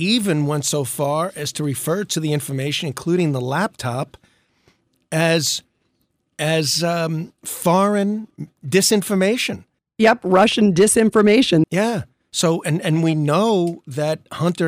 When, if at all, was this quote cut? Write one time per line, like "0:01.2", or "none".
0:11.6